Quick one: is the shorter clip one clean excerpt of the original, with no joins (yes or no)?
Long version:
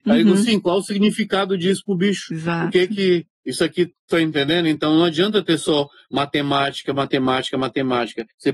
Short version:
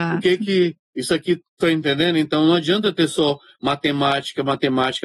yes